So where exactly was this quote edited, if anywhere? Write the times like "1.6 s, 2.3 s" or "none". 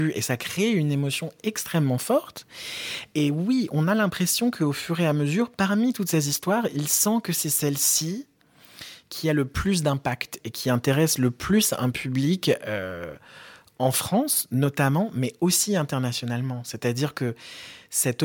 none